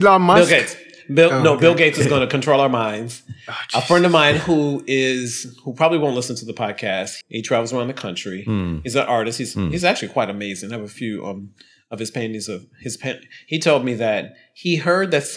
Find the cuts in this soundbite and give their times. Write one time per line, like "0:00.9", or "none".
0:07.2